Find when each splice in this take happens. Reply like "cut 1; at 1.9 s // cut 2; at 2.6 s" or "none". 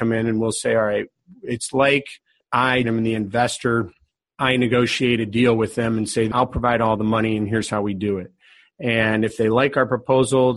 cut 1; at 2.8 s